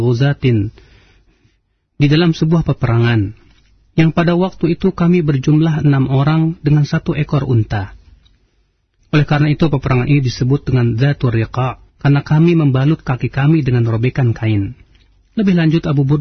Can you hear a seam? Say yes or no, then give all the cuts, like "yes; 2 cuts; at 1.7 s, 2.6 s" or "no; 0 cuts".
yes; 2 cuts; at 9.0 s, 11.9 s